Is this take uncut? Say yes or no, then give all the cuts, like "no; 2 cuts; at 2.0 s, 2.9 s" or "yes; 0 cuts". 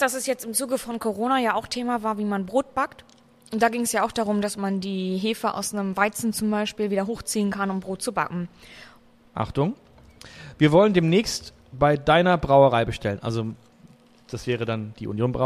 no; 1 cut; at 9.3 s